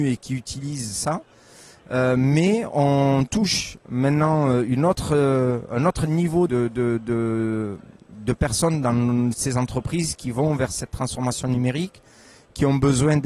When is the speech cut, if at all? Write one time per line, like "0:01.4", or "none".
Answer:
0:06.5